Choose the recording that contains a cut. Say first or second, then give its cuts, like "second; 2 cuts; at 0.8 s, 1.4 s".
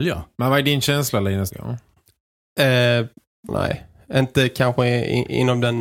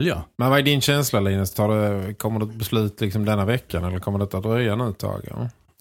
first; 2 cuts; at 1.5 s, 3.5 s